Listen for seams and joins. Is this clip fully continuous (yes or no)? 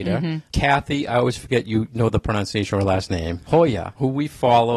no